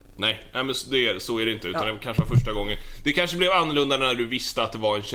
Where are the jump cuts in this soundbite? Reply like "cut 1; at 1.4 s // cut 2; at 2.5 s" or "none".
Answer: none